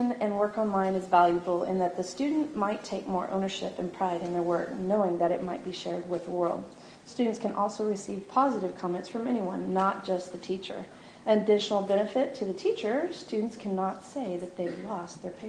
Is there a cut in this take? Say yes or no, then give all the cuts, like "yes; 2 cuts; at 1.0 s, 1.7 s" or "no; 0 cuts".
no; 0 cuts